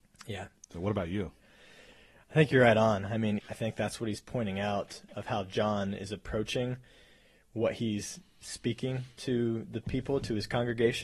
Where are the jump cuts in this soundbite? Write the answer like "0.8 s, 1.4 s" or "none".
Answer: 3.4 s

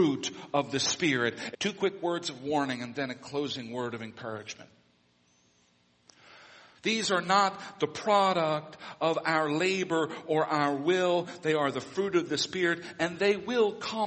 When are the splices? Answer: 1.5 s, 6.7 s

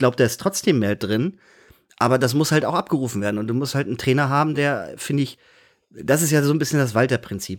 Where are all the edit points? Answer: none

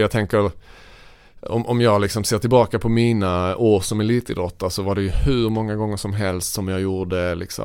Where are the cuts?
none

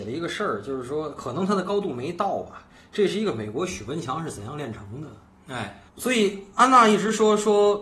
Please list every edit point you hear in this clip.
5.9 s

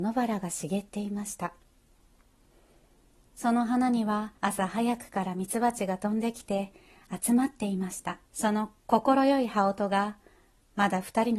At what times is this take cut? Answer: 4.4 s, 8.2 s

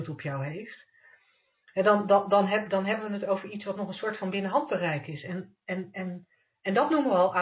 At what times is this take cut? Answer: none

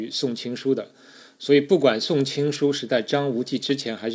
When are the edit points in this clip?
none

